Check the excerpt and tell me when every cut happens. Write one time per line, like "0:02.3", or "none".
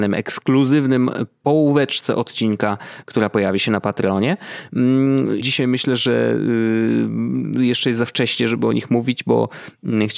0:05.4

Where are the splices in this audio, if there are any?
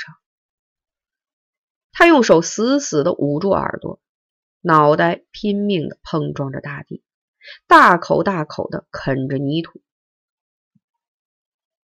0:01.9

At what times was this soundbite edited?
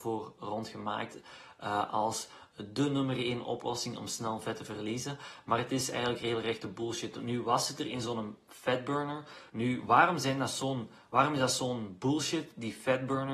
0:09.5

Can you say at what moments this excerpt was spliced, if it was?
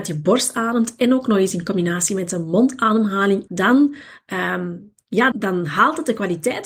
0:03.5
0:05.3

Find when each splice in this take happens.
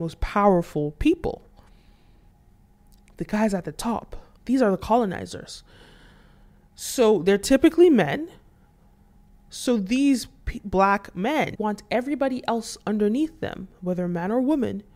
0:04.4
0:11.5

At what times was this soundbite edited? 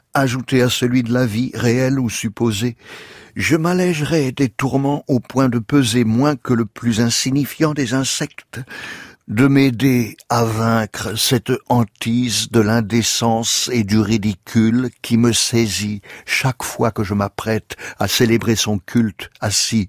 0:09.1

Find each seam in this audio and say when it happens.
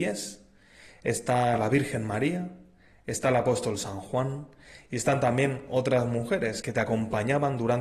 0:06.6

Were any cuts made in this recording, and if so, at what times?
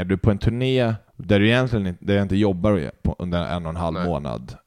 0:01.1

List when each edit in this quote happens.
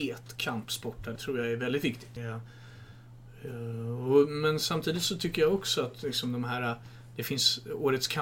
0:01.2
0:02.2

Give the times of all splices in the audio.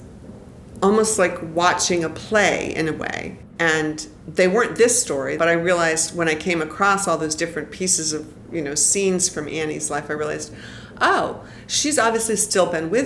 0:03.6
0:05.4

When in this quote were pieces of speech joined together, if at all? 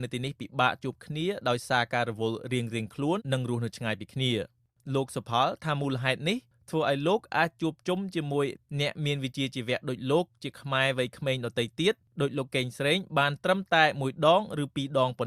0:03.2

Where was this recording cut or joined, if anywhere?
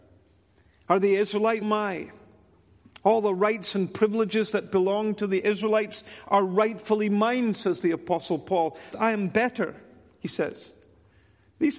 0:01.6
0:08.9

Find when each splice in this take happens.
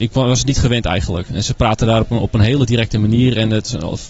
none

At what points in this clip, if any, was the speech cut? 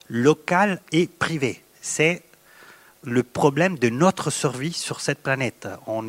none

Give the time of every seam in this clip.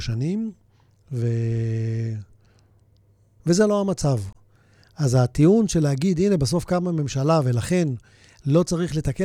0:03.4

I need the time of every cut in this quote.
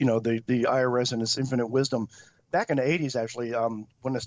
none

